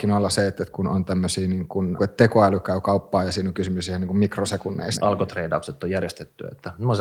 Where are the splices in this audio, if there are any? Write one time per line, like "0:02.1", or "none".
0:02.0
0:05.0